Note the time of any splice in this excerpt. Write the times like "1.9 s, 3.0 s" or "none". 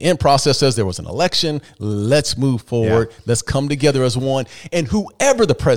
none

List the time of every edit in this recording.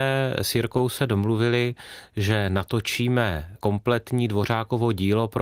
none

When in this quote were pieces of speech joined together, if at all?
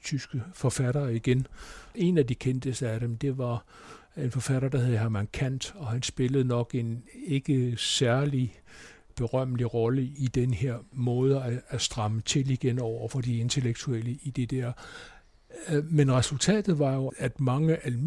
17.1 s

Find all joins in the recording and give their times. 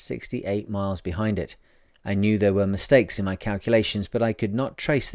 1.9 s

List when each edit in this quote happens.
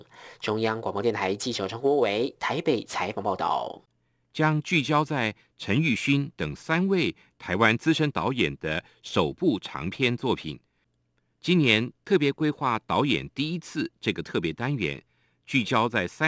4.2 s, 11.3 s

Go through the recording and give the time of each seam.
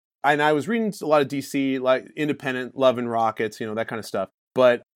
none

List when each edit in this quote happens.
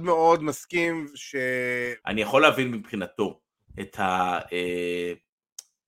2.0 s

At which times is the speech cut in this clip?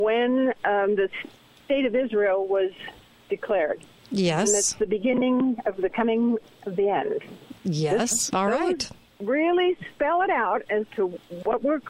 8.3 s

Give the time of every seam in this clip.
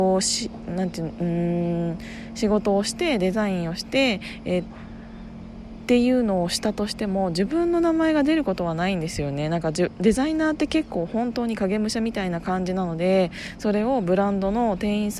4.6 s

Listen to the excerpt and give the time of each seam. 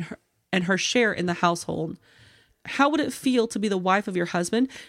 2.5 s

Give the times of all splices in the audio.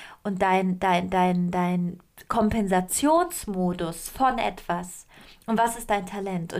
none

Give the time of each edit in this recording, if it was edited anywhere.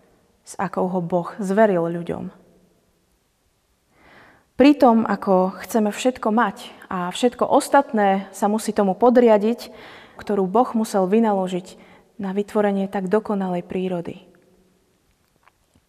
10.2 s

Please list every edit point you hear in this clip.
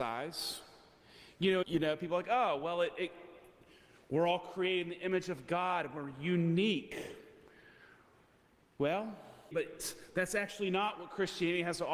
1.6 s, 9.5 s

